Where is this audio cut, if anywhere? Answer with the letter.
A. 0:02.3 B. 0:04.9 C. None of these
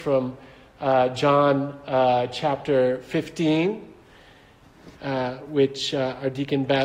C